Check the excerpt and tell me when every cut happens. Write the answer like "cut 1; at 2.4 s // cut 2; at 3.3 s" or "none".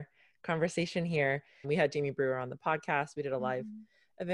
cut 1; at 1.6 s